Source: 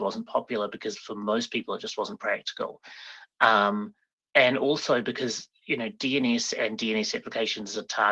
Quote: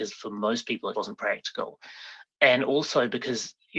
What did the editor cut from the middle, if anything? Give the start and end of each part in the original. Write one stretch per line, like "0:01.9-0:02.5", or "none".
0:01.8-0:02.0
0:03.3-0:04.3